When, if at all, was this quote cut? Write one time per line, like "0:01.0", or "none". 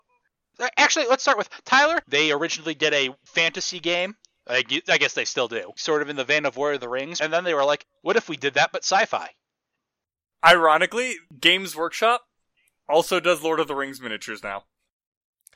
0:02.0